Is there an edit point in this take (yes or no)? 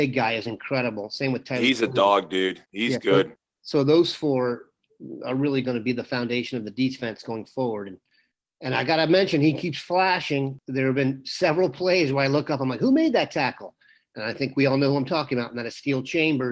no